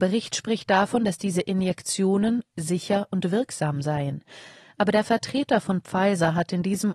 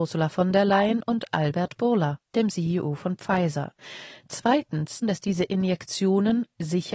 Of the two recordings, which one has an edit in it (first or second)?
second